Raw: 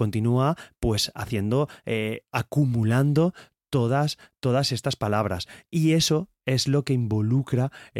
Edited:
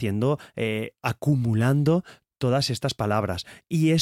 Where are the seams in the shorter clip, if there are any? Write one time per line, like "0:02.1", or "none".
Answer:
0:02.3